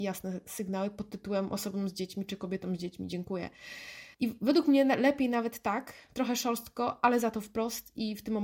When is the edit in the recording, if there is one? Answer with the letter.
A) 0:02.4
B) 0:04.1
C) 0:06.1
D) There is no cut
B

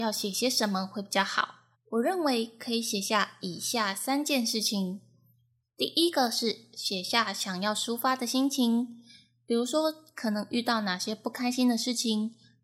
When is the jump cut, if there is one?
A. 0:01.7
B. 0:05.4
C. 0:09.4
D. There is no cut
A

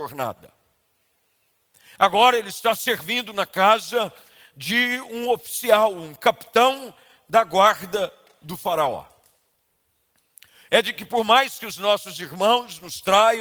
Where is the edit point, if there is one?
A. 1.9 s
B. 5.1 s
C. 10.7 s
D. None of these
C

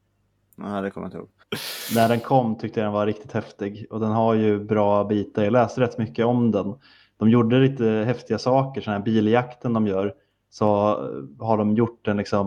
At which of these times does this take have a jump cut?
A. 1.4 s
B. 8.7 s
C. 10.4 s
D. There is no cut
A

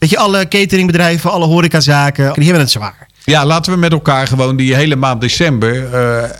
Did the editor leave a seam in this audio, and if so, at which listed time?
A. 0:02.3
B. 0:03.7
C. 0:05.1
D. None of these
A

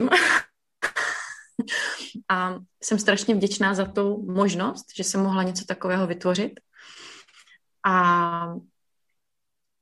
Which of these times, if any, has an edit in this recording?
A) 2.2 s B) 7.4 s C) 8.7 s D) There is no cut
A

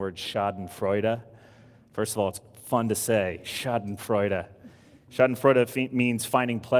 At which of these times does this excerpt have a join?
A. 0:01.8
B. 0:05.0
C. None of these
C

